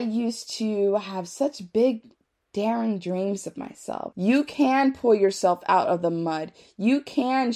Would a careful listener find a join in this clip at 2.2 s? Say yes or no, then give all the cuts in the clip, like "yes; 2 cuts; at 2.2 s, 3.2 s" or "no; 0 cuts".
no; 1 cut; at 4.1 s